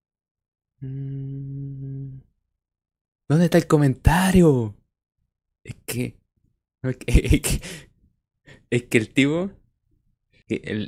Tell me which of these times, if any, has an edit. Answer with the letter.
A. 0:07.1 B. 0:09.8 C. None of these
C